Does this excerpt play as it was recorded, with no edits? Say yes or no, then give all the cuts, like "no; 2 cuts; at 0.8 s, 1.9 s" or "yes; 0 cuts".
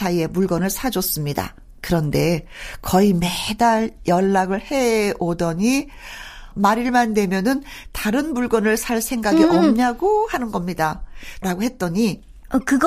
no; 2 cuts; at 6.5 s, 11.4 s